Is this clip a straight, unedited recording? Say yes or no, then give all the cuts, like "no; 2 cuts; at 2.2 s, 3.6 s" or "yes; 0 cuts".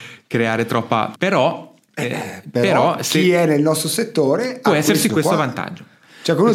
no; 2 cuts; at 1.2 s, 5.1 s